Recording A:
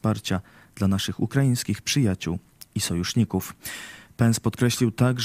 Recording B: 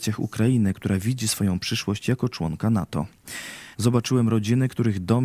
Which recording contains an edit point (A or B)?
B